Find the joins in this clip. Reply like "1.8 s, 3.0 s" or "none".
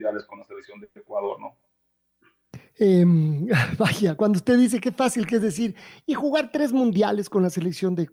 none